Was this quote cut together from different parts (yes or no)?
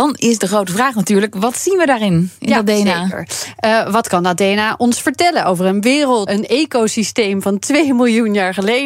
yes